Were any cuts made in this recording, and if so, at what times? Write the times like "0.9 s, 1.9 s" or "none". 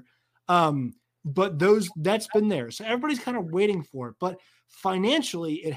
none